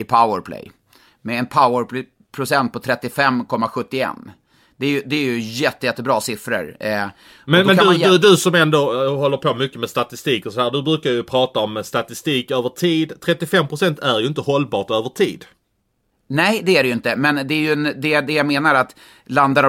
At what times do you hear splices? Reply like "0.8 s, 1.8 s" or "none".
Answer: none